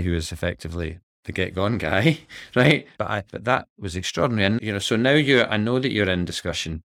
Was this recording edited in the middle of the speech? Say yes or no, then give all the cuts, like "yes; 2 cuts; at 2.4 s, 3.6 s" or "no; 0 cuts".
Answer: yes; 2 cuts; at 3.0 s, 4.6 s